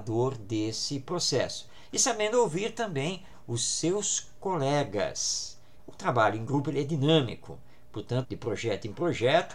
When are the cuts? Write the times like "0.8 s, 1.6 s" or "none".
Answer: 5.8 s, 8.2 s